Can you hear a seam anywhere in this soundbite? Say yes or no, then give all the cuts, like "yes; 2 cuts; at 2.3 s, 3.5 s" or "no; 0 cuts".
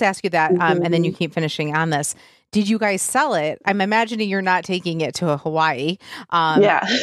no; 0 cuts